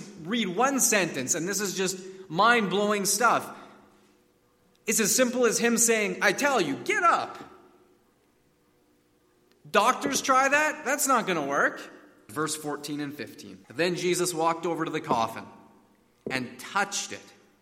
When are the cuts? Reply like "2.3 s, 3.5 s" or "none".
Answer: 12.3 s, 13.6 s